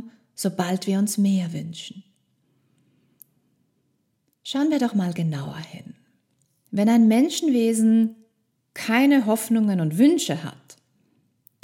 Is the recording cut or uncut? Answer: uncut